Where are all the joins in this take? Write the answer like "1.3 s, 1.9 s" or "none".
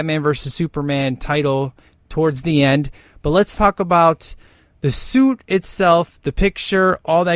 none